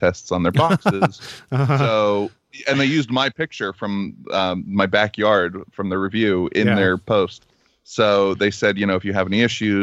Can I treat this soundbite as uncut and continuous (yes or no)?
yes